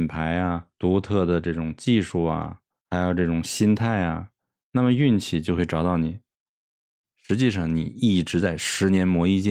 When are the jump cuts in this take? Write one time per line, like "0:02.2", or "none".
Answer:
0:07.0